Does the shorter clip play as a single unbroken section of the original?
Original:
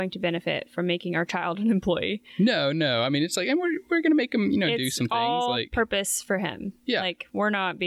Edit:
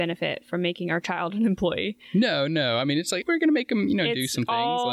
no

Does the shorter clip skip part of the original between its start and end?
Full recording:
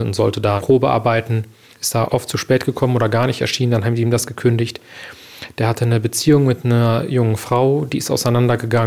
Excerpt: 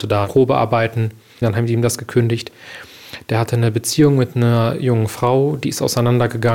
yes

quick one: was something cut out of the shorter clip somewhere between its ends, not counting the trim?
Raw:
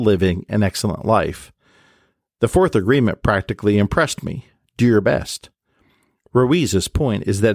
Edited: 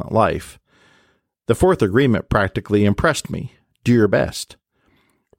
no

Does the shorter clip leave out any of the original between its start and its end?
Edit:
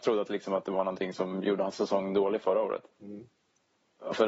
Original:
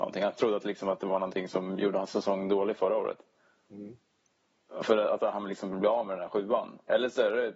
yes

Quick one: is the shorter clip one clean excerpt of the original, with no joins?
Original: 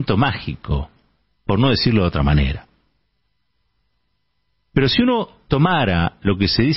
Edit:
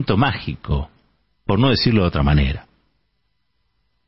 yes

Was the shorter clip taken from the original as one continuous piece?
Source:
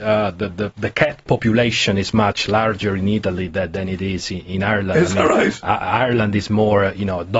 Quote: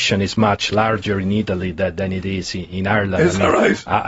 yes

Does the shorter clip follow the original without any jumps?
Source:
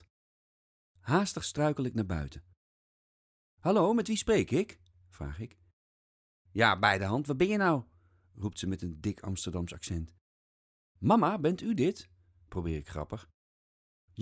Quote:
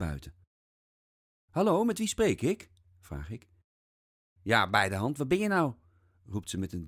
yes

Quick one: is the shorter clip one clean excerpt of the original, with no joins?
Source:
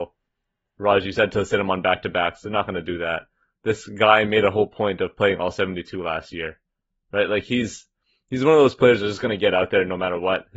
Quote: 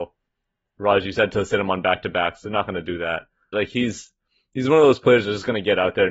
no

